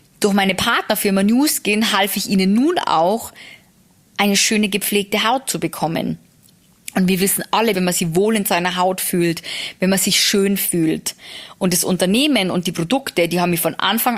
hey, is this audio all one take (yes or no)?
no